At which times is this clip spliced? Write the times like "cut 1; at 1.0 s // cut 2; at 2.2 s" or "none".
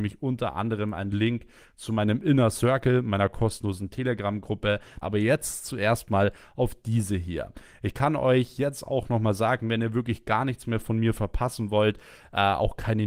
cut 1; at 5.0 s